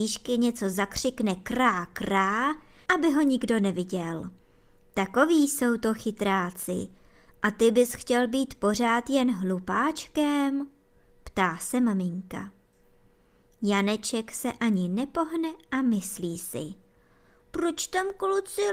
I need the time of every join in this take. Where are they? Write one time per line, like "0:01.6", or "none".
0:02.9